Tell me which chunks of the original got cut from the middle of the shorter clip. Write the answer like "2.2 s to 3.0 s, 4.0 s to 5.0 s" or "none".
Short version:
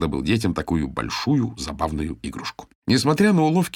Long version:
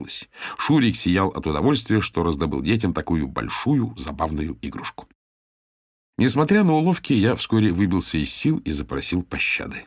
5.1 s to 6.1 s